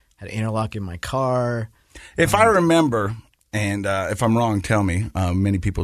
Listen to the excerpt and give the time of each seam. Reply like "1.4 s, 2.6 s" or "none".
none